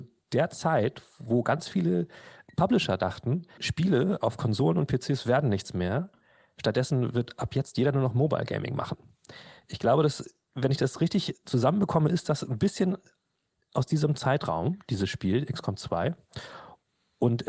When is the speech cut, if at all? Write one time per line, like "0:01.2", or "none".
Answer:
0:03.6

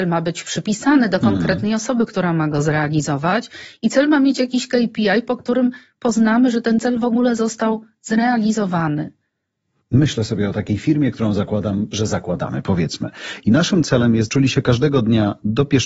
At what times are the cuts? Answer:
0:09.8
0:14.3

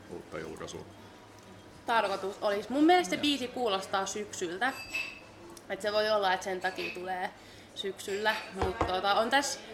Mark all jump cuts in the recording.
none

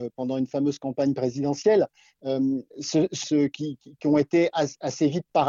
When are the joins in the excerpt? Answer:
0:03.2

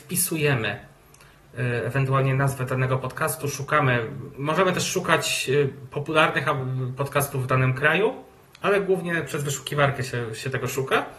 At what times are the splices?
none

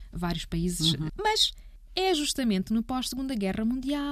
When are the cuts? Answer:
0:01.1

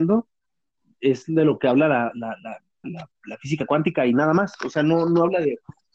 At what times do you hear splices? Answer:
0:02.8

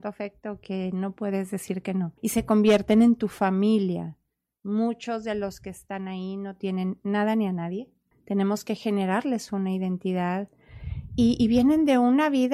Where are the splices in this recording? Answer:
0:02.2
0:08.1

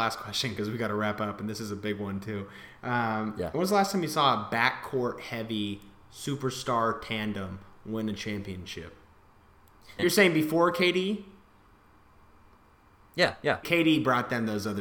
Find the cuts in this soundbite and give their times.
0:10.0
0:13.6

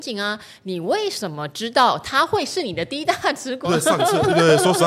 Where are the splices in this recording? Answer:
0:03.6

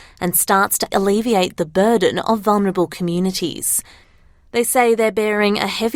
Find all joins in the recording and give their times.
0:00.9

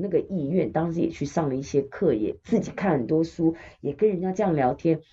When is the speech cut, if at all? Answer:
none

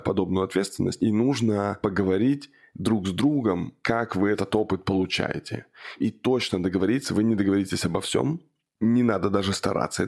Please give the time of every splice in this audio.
none

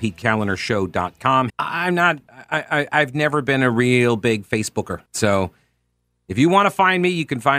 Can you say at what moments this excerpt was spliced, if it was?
0:01.5
0:05.1

